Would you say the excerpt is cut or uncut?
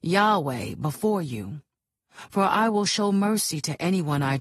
uncut